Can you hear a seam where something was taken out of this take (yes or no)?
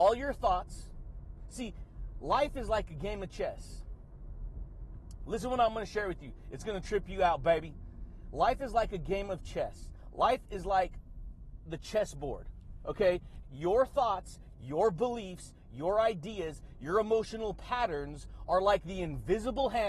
yes